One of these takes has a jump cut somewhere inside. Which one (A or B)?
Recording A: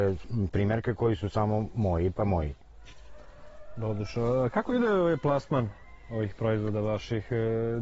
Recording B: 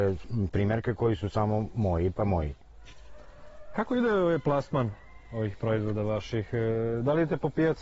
B